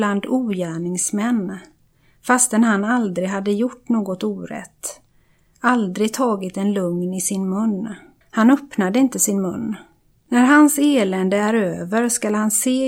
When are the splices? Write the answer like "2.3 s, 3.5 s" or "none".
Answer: 8.2 s, 10.1 s